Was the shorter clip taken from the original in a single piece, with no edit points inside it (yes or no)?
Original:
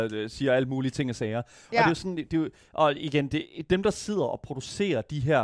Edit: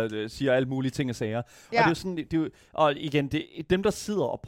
yes